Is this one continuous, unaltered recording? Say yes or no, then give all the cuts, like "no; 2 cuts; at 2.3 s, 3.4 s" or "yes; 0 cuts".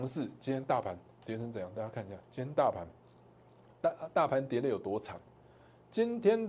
no; 1 cut; at 2.2 s